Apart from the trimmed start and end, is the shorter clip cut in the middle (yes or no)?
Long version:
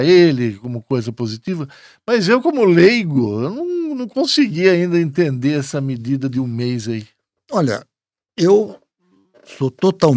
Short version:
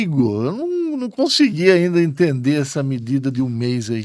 no